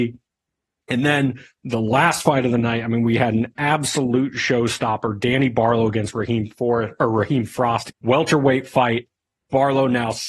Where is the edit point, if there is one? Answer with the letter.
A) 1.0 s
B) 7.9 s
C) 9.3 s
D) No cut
B